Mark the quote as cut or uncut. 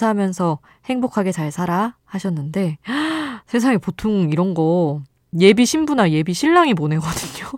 cut